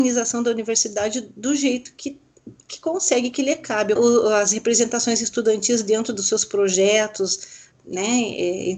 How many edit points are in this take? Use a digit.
2